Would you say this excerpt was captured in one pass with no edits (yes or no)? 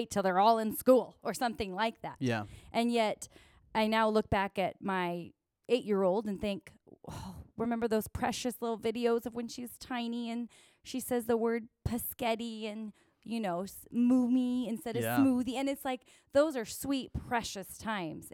yes